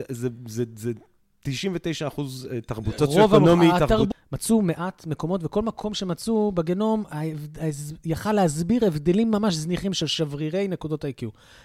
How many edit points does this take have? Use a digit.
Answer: 2